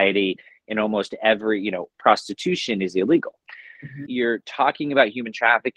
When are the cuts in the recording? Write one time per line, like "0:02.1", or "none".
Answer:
0:01.9
0:04.1